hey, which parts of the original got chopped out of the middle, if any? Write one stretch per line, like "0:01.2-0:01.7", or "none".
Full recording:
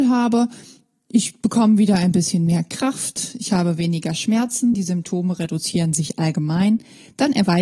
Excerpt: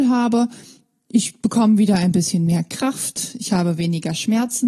none